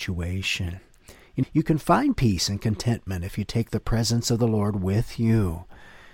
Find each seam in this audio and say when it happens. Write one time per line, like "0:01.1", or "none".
0:01.4